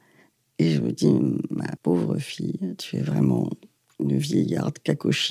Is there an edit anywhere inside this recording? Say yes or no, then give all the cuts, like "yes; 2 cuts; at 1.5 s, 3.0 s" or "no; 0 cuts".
yes; 1 cut; at 1.8 s